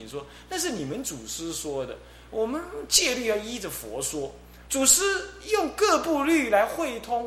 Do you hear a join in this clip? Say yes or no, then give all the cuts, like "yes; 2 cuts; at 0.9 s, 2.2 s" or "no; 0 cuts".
yes; 1 cut; at 4.7 s